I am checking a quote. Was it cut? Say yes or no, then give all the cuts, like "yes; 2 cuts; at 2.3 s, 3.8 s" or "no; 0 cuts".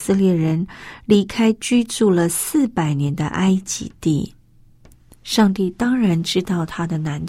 no; 0 cuts